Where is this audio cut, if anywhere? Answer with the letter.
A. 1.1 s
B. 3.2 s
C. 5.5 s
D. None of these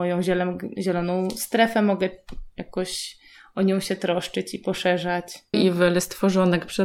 C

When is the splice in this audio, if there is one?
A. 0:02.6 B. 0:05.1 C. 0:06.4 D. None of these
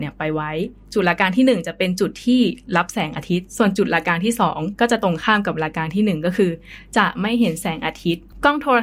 D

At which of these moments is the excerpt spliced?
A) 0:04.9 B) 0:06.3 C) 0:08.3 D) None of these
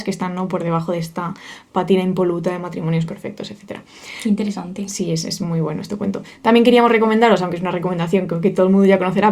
D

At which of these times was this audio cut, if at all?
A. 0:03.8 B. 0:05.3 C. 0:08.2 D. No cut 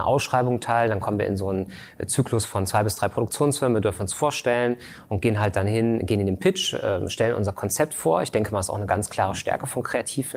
D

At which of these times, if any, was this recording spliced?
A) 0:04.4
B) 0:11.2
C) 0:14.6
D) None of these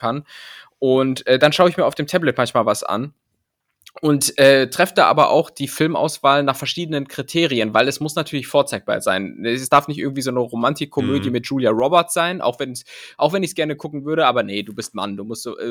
D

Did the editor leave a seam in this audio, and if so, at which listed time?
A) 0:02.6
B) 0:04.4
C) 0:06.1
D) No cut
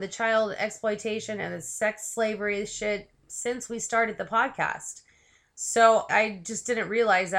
C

